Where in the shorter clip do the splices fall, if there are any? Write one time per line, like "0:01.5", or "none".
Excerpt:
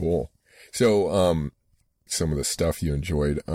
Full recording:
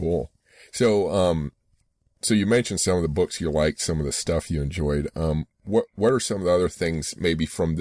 0:02.1